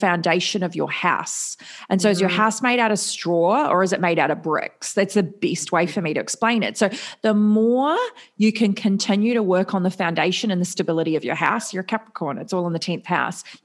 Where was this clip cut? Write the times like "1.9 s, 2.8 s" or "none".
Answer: none